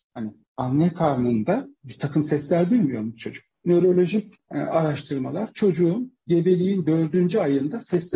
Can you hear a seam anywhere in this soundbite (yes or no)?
no